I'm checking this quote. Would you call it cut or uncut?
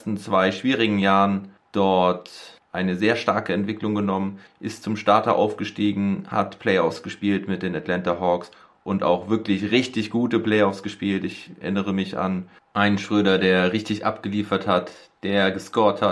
uncut